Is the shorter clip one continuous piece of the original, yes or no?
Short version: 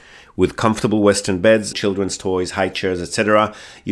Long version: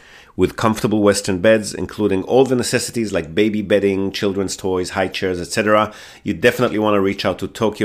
no